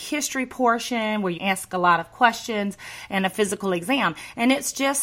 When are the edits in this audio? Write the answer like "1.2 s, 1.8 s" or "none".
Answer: 1.4 s